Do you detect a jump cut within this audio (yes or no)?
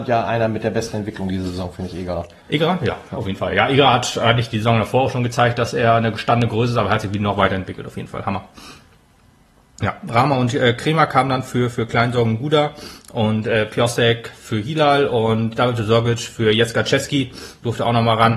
no